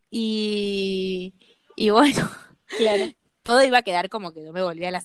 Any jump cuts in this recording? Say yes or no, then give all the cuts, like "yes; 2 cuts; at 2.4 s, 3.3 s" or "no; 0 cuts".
no; 0 cuts